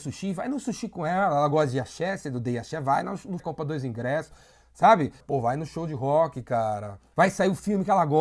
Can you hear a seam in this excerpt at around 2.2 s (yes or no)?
no